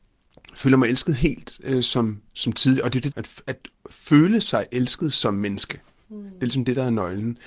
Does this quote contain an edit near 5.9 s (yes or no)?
no